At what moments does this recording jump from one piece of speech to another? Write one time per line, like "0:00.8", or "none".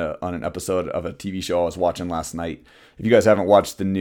none